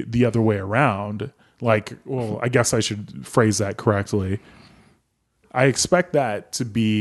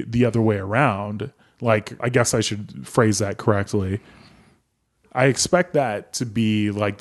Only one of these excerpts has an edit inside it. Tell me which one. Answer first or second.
second